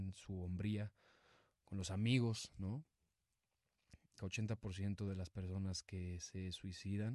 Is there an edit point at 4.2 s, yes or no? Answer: yes